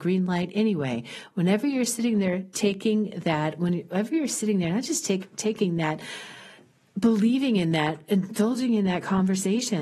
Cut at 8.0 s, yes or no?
no